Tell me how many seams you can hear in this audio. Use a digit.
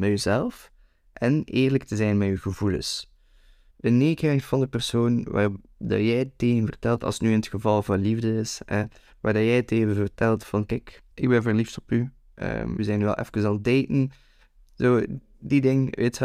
3